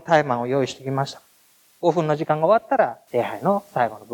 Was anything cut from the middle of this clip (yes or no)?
yes